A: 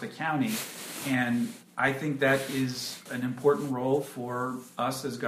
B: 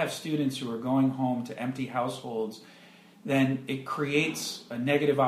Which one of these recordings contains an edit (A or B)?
A